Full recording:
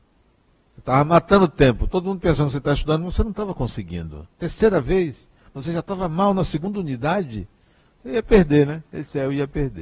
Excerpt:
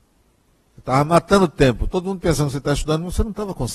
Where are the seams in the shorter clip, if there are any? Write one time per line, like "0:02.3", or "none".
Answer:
none